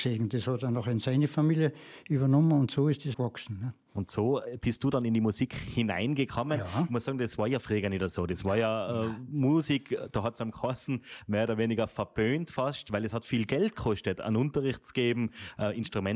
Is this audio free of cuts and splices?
no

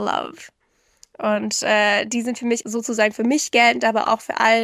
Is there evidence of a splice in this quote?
yes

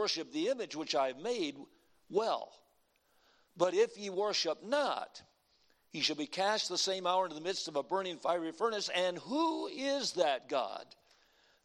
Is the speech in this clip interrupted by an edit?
no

